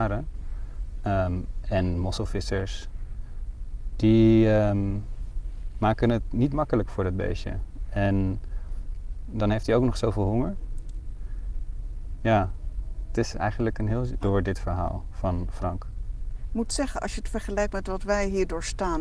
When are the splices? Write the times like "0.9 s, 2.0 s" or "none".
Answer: 14.2 s